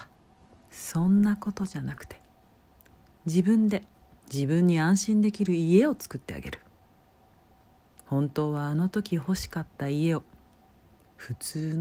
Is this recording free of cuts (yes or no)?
yes